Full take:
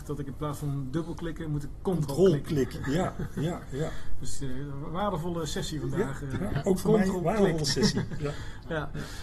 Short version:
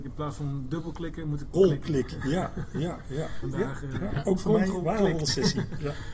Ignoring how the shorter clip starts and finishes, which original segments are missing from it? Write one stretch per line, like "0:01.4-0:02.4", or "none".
0:01.8-0:02.2
0:04.0-0:05.8